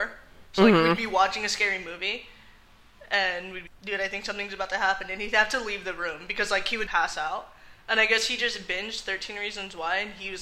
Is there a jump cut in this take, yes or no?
yes